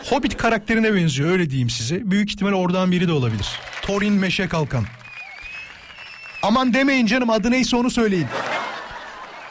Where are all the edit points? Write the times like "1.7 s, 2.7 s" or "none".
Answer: none